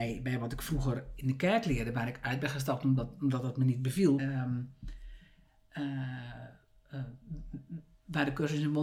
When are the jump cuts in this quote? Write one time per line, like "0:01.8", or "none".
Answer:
0:04.2